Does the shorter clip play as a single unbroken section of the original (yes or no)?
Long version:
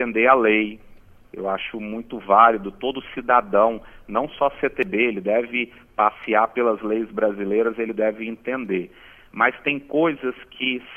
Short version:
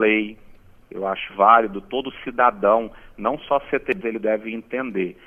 no